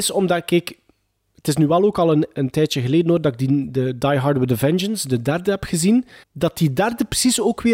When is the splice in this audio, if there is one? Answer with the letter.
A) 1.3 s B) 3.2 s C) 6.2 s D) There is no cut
C